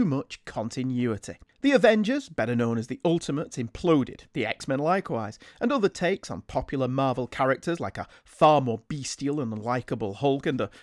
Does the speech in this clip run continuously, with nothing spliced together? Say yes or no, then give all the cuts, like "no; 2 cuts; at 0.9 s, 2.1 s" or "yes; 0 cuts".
no; 1 cut; at 1.4 s